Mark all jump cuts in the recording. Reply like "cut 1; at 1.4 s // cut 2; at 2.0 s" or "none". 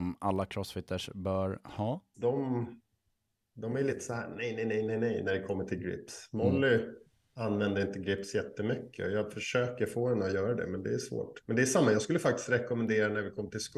cut 1; at 2.1 s